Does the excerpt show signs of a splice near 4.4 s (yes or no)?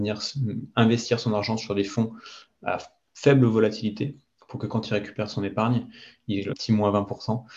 no